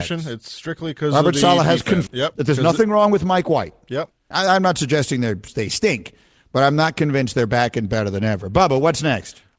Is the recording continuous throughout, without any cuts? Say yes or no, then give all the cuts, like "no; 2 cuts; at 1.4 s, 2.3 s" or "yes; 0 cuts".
no; 2 cuts; at 2.1 s, 4.3 s